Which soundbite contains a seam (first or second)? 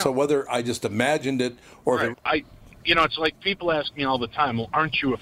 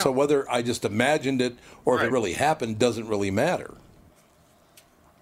first